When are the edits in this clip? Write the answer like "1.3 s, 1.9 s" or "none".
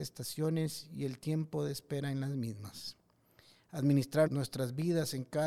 4.3 s